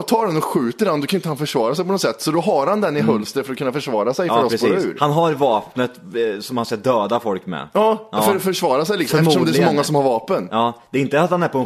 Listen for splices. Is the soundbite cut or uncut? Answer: uncut